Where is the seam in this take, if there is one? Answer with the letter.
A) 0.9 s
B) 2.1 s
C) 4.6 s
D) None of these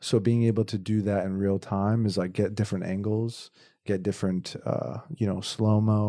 D